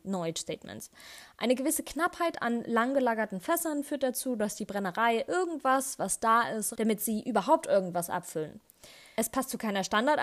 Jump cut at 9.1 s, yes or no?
no